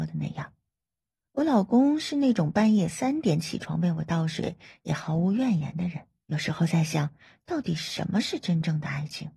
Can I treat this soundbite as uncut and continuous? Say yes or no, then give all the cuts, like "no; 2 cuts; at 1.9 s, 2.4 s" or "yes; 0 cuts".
no; 1 cut; at 6.2 s